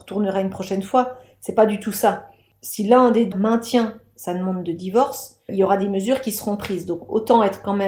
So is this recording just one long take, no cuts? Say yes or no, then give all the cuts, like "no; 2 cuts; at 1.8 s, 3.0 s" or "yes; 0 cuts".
no; 2 cuts; at 3.3 s, 5.5 s